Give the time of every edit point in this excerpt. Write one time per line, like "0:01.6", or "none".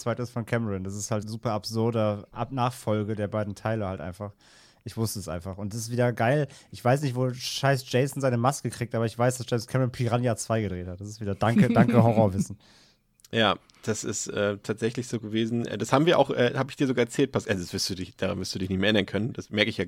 0:01.2